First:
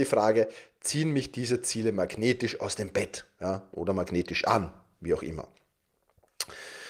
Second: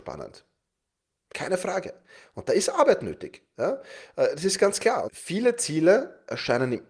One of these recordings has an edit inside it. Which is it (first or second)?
second